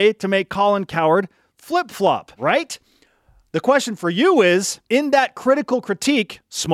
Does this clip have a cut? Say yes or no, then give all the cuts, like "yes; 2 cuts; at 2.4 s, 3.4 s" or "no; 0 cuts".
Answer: yes; 2 cuts; at 2.3 s, 4.9 s